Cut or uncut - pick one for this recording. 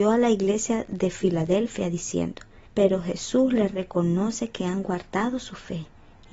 cut